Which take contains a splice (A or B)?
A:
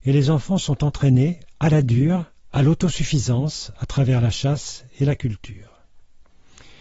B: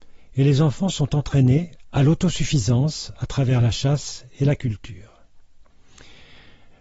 B